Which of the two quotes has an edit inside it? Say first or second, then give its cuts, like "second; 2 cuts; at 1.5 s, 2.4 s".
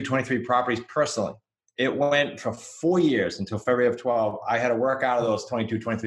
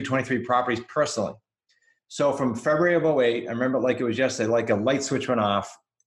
first; 1 cut; at 1.7 s